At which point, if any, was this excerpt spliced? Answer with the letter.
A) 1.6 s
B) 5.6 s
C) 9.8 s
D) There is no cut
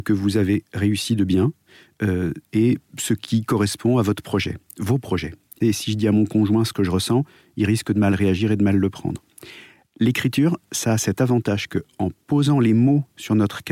B